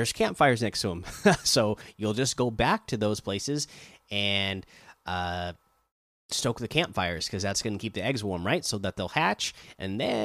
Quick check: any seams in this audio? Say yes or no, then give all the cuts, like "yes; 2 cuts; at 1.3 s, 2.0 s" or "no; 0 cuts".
no; 0 cuts